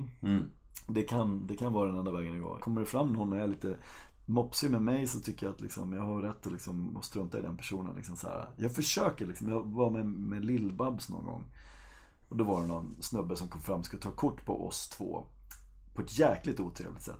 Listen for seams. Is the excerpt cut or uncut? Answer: cut